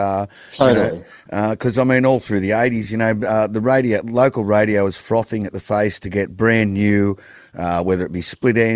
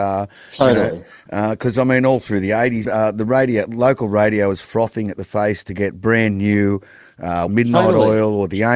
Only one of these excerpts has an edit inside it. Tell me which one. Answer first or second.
second